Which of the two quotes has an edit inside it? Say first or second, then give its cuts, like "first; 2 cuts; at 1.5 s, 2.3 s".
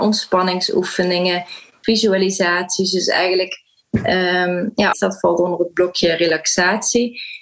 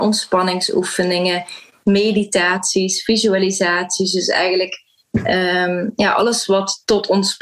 first; 2 cuts; at 1.8 s, 4.9 s